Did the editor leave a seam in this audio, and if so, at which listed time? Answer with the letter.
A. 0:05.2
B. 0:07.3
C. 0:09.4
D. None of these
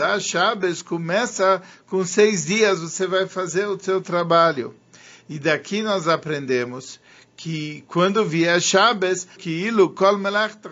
C